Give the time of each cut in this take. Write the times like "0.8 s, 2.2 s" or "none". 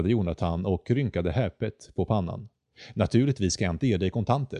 none